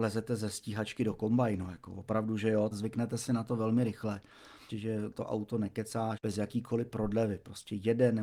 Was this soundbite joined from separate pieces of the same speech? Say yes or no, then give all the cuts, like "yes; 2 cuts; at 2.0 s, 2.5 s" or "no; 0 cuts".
yes; 3 cuts; at 2.7 s, 4.7 s, 6.2 s